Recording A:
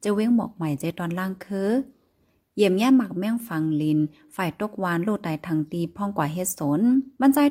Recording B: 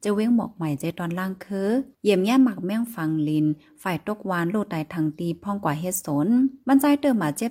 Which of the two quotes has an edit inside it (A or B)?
B